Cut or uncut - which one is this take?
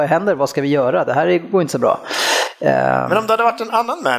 uncut